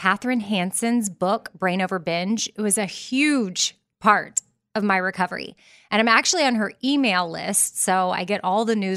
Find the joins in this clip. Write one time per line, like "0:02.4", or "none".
none